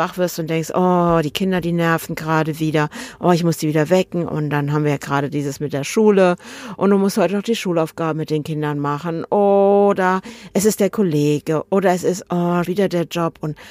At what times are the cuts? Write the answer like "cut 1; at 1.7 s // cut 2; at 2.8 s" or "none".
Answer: cut 1; at 12.7 s